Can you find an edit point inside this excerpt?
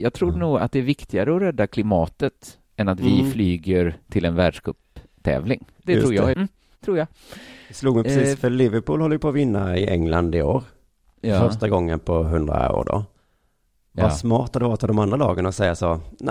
yes; 1 cut; at 6.3 s

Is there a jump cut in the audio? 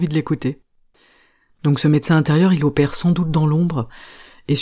no; 0 cuts

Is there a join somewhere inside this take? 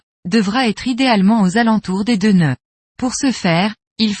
yes; 1 cut; at 2.8 s

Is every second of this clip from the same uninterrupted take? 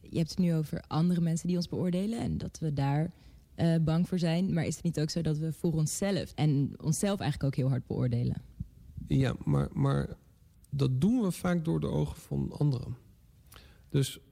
no; 1 cut; at 6.3 s

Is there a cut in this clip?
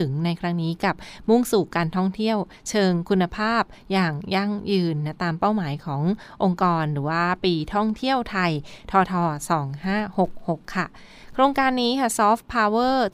yes; 1 cut; at 9.1 s

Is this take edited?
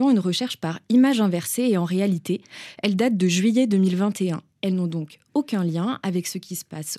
yes; 1 cut; at 4.5 s

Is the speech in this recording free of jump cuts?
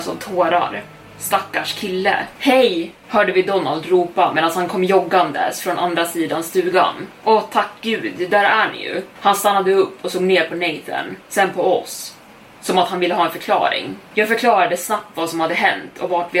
no; 1 cut; at 2.3 s

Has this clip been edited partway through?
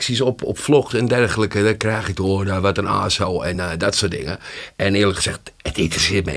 no; 0 cuts

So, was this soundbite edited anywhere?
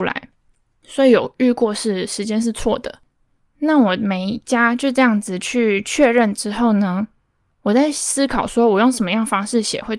no; 0 cuts

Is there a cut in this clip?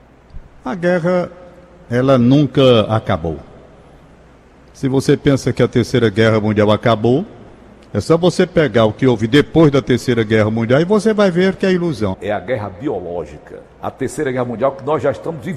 yes; 2 cuts; at 12.1 s, 13.6 s

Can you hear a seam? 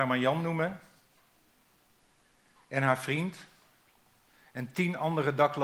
no; 0 cuts

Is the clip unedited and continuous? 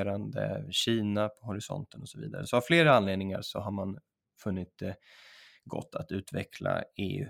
yes; 0 cuts

